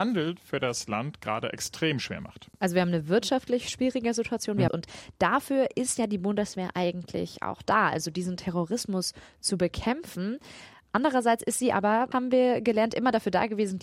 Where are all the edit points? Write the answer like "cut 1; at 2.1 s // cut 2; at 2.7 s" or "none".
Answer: cut 1; at 4.7 s // cut 2; at 12.1 s